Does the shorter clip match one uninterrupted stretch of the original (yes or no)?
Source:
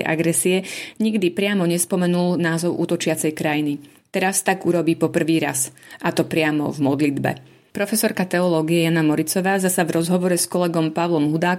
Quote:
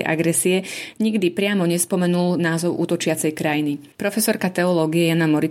no